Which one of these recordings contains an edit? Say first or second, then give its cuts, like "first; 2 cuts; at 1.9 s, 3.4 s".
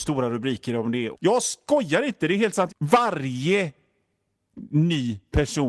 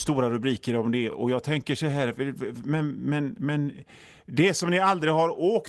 first; 2 cuts; at 1.1 s, 2.7 s